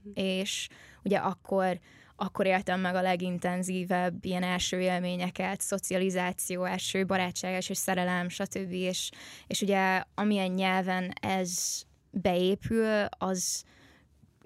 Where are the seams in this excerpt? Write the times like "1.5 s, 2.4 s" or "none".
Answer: none